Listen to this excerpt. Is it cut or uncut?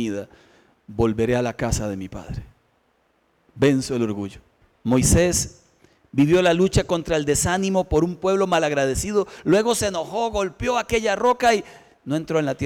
cut